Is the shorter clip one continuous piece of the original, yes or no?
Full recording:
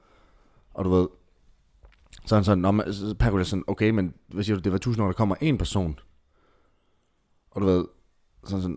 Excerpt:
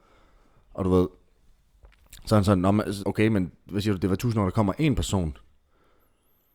no